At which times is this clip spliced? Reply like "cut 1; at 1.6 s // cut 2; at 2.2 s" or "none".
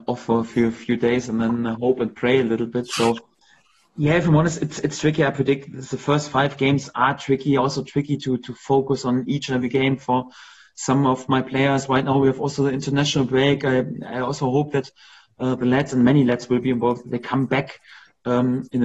none